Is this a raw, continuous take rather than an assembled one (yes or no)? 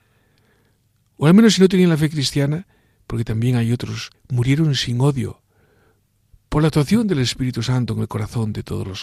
no